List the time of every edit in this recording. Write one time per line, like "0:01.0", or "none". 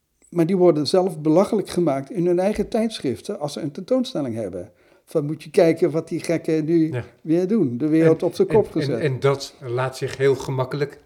none